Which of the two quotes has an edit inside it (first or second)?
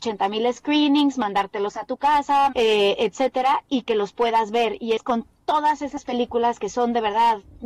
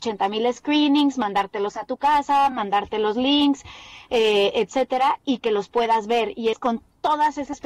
first